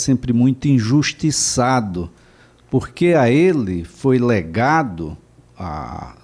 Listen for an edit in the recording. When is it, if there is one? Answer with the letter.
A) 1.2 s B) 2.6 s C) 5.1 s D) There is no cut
D